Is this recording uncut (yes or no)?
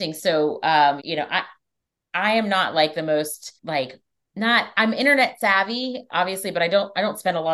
no